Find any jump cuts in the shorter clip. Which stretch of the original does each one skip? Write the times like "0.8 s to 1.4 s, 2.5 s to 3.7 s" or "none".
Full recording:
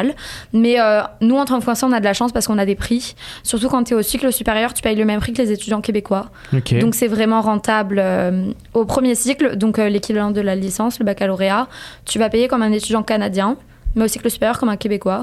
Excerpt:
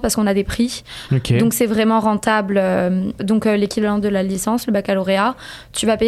3.4 s to 6.5 s, 8.6 s to 9.5 s